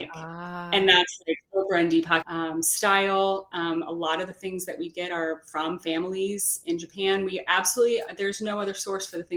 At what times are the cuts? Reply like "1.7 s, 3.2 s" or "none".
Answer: 2.2 s